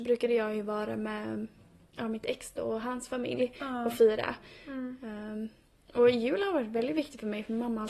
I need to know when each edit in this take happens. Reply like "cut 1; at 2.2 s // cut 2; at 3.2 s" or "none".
none